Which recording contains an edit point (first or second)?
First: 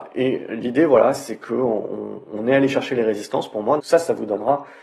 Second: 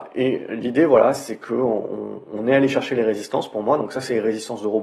first